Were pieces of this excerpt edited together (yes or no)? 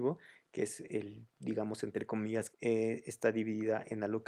yes